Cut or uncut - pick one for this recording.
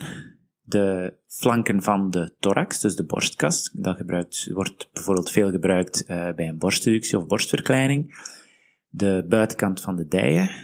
uncut